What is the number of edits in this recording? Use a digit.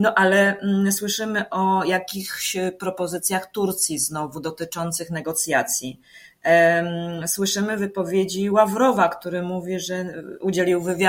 0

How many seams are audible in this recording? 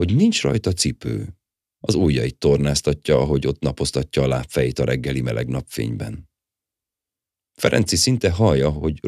1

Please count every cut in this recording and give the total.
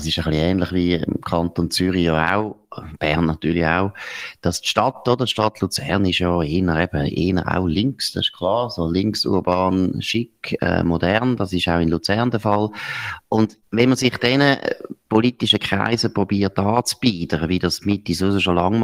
1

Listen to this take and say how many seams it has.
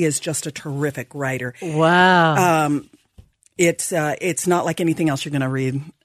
0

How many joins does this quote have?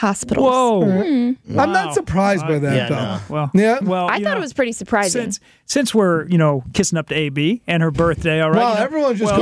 1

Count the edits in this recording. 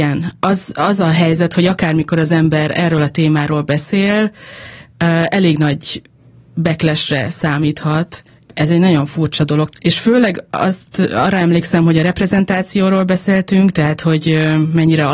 1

